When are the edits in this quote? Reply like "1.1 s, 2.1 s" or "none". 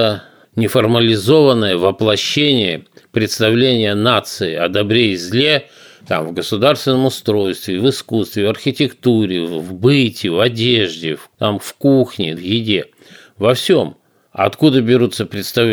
none